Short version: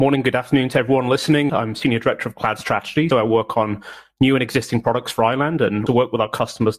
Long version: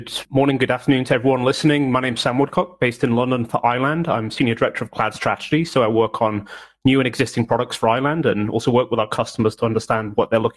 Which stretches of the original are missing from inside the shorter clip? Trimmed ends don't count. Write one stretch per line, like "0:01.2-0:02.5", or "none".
0:01.8-0:04.0
0:05.7-0:05.7
0:08.5-0:08.6